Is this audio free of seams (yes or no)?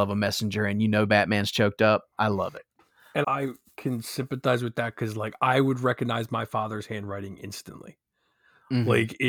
no